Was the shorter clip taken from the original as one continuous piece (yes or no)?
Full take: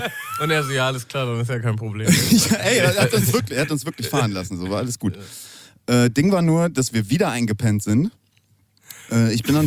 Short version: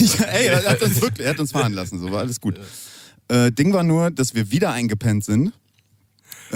no